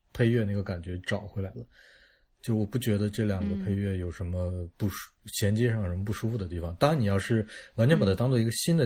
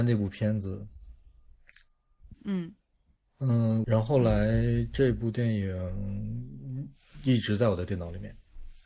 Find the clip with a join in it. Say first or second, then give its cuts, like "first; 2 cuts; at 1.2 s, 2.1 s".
second; 2 cuts; at 2.3 s, 3.8 s